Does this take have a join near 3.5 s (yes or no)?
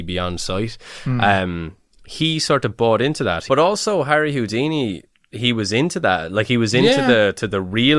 yes